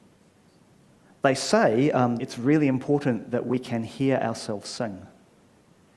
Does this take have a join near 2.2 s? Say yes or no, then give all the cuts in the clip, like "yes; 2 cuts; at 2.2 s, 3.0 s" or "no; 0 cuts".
yes; 1 cut; at 2.2 s